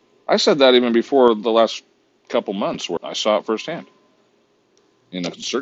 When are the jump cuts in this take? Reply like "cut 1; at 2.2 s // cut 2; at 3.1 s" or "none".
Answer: cut 1; at 3.0 s